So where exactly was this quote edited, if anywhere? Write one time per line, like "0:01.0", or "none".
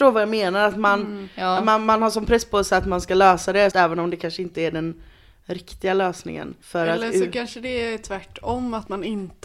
0:03.7
0:06.6